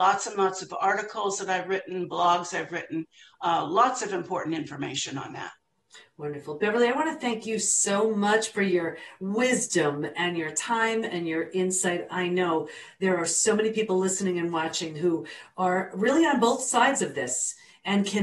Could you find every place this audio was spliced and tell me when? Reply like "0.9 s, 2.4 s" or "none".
none